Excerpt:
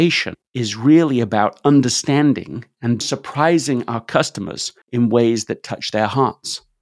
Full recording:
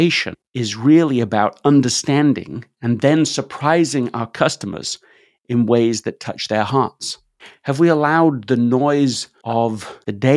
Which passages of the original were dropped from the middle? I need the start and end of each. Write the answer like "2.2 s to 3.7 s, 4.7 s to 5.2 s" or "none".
3.0 s to 3.3 s, 5.1 s to 5.4 s

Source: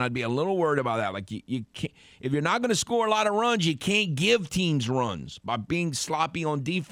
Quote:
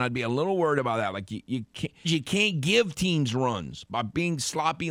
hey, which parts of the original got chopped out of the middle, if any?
2.0 s to 3.6 s

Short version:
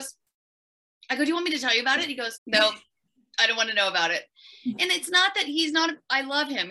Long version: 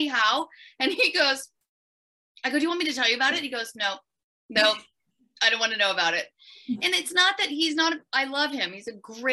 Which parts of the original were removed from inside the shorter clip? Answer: 3.7 s to 4.4 s

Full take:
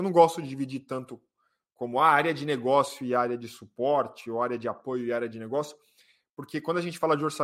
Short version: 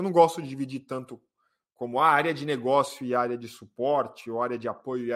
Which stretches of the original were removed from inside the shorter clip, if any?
none

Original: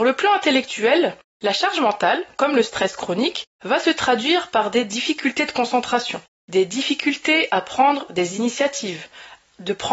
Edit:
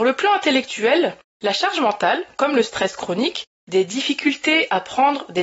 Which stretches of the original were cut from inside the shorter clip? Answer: 3.6 s to 6.4 s

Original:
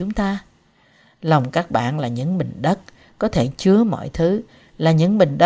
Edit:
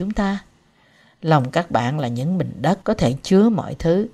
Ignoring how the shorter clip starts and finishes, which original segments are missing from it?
2.8 s to 3.2 s

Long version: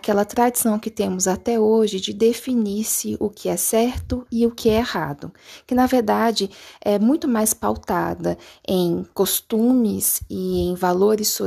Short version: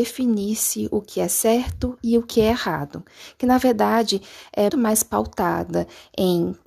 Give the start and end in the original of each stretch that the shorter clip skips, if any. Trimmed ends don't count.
7.0 s to 7.2 s

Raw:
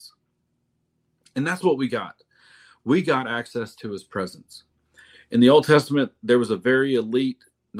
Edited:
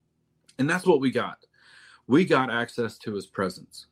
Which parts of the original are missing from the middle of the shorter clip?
none

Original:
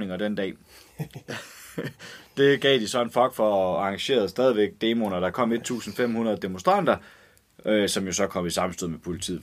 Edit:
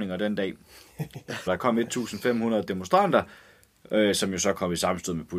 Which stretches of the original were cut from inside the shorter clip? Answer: 1.5 s to 5.2 s

